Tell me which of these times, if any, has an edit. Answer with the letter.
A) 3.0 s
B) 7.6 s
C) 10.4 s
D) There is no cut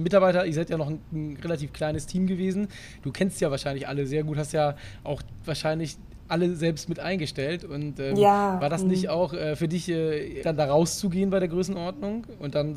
C